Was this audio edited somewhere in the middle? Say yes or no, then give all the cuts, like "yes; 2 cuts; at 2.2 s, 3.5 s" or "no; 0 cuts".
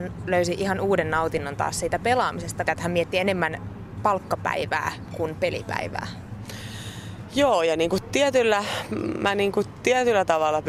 yes; 1 cut; at 2.6 s